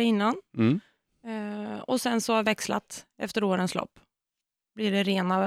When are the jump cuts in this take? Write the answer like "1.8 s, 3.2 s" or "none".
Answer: none